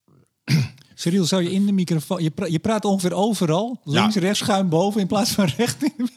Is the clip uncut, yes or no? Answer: no